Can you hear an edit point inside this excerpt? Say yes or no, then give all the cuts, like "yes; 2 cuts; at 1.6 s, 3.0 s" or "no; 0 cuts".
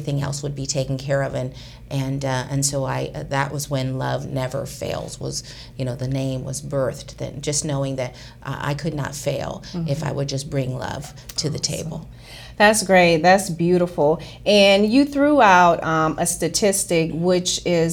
no; 0 cuts